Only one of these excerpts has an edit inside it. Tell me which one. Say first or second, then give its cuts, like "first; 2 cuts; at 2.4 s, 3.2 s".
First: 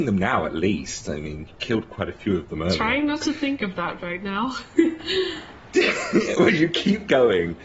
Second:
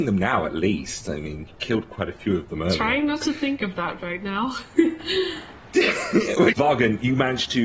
second; 1 cut; at 6.5 s